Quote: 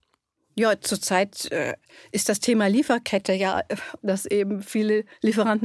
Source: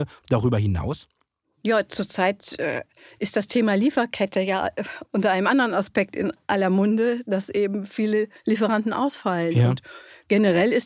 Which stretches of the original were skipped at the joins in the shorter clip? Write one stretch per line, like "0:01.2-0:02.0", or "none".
0:05.1-0:07.2

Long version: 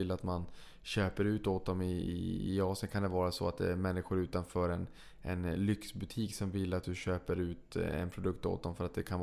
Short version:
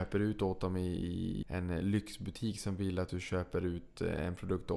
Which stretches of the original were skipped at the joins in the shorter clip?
0:02.5-0:05.2

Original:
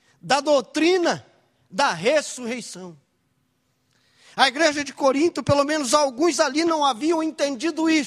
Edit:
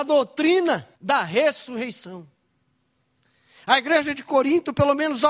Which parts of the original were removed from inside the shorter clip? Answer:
0:01.3-0:01.6

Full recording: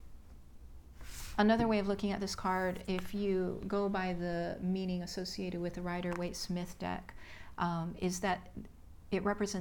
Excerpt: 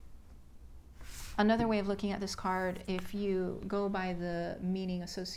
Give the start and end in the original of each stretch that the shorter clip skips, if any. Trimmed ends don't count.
none

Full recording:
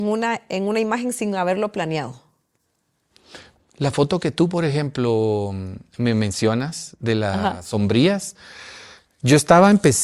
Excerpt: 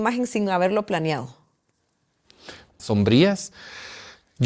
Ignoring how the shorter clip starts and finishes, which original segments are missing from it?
0:03.7-0:07.6

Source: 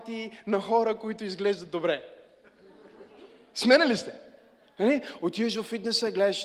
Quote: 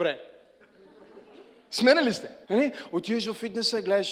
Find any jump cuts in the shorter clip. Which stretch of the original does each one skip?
0:04.3-0:04.7

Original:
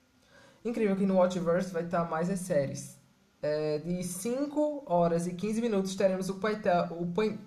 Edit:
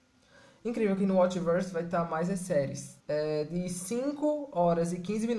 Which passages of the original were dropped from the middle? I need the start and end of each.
0:03.0-0:03.3

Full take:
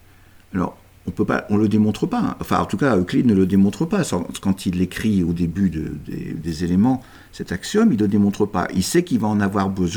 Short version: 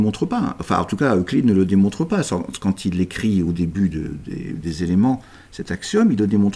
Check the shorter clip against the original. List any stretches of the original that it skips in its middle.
none

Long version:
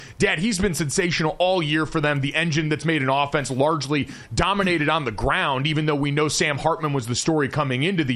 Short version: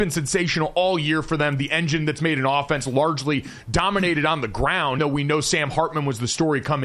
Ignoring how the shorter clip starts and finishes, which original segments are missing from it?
0:05.6-0:05.9

